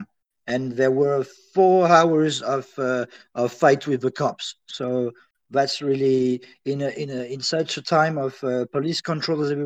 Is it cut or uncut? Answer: uncut